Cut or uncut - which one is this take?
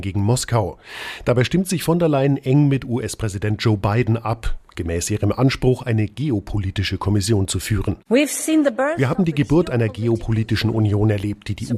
uncut